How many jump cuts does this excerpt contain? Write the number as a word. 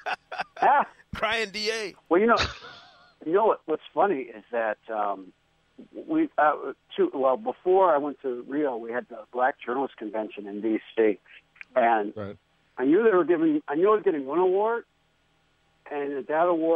zero